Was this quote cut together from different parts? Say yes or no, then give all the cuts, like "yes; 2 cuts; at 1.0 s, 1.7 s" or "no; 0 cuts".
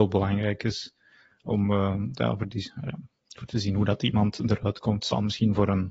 no; 0 cuts